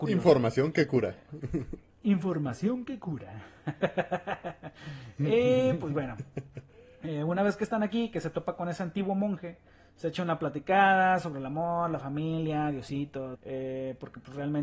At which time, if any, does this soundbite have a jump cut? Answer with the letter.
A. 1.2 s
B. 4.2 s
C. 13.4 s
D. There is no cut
C